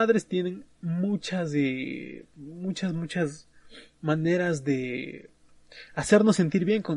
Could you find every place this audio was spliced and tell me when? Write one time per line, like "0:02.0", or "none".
0:02.3